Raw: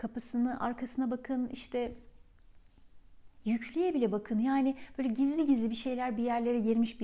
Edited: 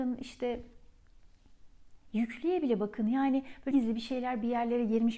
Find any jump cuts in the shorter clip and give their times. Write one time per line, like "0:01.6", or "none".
0:03.7